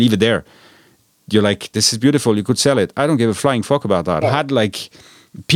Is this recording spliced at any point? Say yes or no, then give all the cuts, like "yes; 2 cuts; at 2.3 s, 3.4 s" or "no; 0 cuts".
yes; 2 cuts; at 1.7 s, 4.2 s